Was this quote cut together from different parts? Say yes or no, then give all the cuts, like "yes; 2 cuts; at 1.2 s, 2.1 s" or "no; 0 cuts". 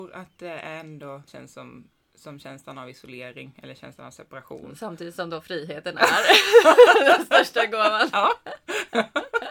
yes; 1 cut; at 1.3 s